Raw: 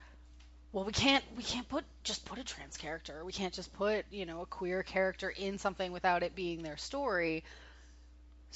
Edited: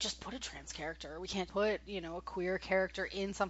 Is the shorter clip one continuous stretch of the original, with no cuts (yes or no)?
no